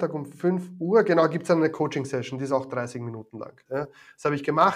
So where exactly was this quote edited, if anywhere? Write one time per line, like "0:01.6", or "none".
0:03.7